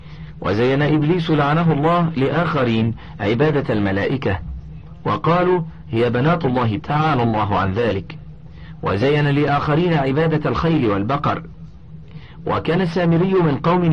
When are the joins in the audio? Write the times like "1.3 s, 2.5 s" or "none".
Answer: 6.8 s

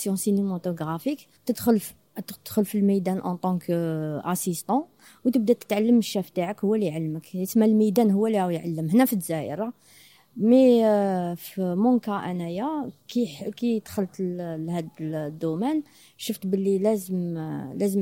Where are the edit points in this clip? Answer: 1.4 s

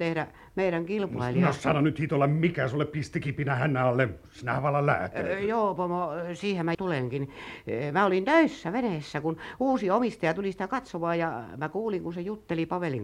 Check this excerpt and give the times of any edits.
6.7 s

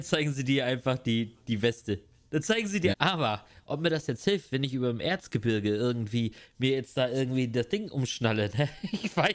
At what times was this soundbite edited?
2.9 s

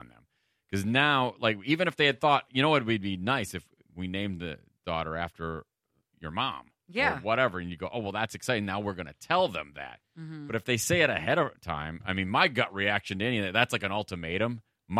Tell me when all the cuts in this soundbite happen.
none

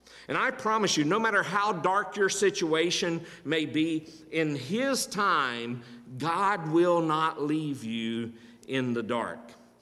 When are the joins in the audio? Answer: none

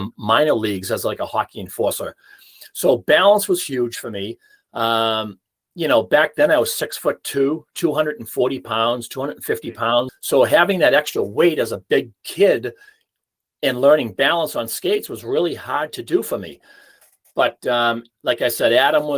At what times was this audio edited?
10.1 s

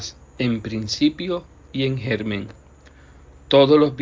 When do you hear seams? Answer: none

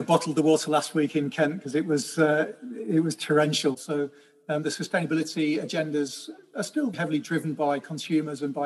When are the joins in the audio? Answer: 3.7 s, 6.9 s

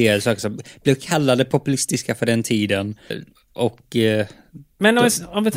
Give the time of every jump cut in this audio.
3.1 s

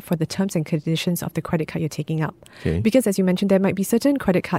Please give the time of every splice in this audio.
none

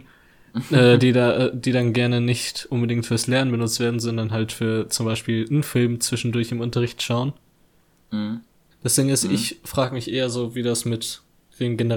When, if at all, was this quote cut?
8.7 s

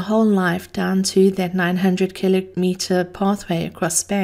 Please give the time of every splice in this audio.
none

